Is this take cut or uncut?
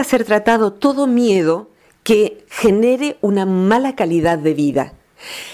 uncut